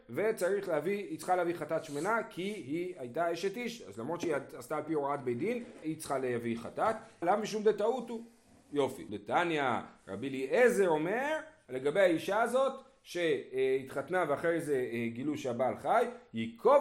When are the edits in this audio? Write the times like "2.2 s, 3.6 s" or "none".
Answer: 5.8 s, 7.2 s, 9.1 s